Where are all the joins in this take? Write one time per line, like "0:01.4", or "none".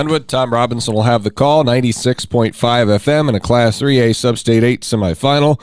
none